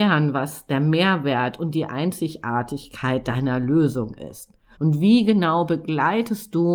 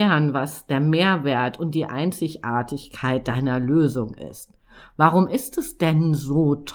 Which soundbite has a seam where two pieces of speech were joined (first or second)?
first